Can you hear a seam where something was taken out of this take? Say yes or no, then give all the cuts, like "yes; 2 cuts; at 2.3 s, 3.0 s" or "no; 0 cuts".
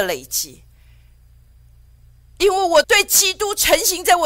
yes; 1 cut; at 2.8 s